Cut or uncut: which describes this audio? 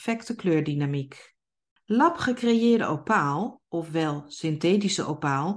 cut